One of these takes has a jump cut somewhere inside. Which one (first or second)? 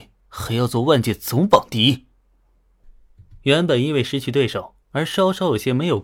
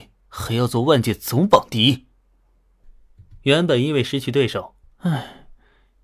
second